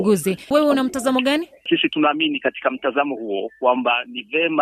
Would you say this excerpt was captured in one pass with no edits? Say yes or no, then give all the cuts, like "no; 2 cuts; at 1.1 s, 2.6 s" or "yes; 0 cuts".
no; 1 cut; at 3.2 s